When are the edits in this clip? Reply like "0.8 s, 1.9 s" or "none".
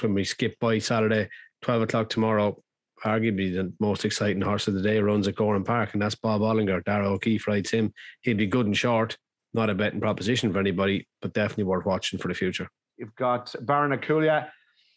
12.9 s